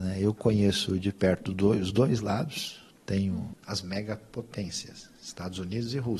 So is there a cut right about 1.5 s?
no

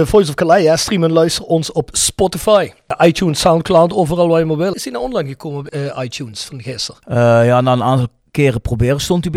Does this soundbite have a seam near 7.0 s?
no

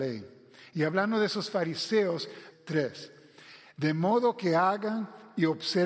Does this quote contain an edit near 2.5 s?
yes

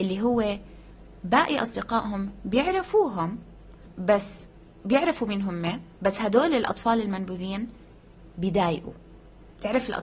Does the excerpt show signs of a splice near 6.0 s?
yes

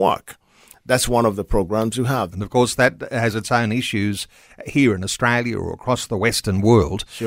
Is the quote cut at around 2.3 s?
yes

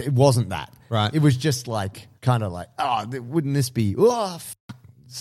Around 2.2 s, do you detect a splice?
yes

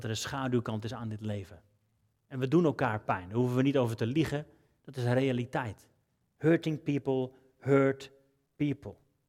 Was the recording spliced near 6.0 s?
no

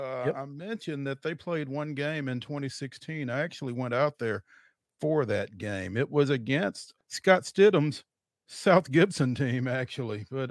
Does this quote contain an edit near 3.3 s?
no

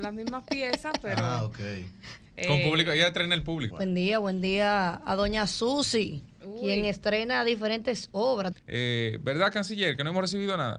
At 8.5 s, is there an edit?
yes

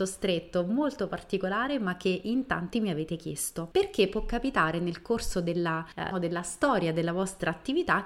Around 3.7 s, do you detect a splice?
no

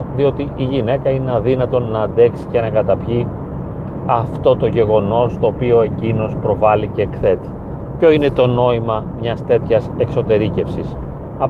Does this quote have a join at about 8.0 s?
yes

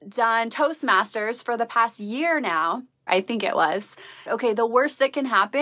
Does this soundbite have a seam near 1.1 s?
no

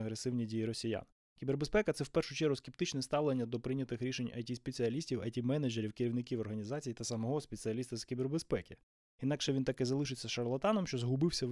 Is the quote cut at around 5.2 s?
no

